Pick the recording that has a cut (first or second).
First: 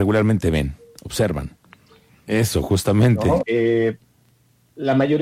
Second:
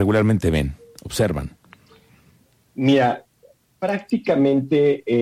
first